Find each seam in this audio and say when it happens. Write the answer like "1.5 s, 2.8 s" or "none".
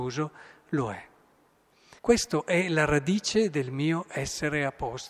2.0 s

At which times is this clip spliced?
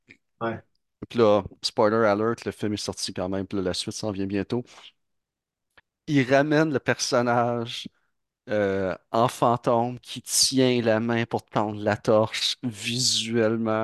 none

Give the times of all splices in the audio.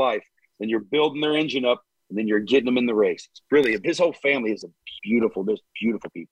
3.8 s, 5.0 s

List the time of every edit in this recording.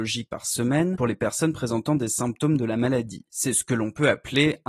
none

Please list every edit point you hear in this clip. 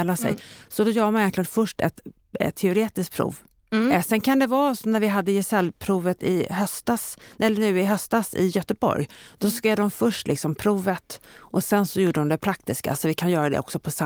none

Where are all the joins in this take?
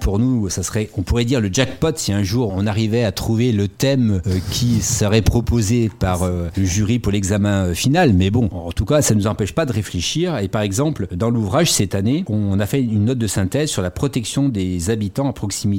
2.5 s

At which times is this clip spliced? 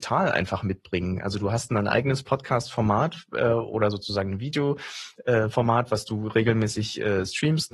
none

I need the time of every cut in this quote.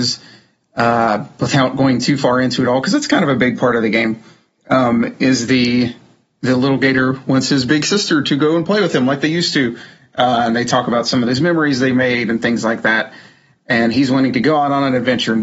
none

